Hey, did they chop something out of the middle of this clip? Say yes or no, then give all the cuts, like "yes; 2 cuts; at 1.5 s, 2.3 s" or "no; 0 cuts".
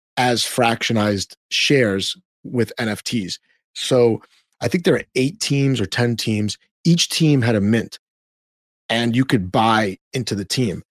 no; 0 cuts